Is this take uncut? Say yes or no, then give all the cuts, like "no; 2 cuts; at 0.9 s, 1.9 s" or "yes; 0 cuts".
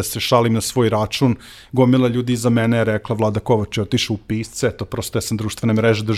yes; 0 cuts